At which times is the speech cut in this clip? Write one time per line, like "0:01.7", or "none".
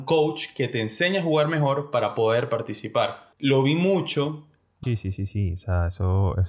0:03.3
0:04.8